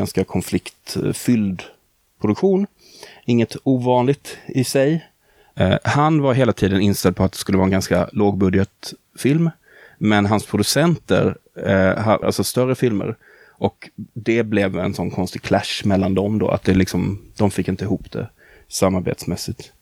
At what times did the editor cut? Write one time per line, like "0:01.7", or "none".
0:12.2